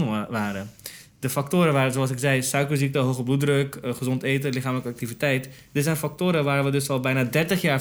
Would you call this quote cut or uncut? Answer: uncut